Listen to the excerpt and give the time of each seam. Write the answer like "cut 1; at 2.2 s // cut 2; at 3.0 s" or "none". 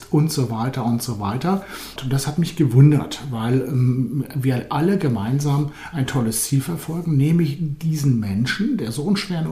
cut 1; at 2.0 s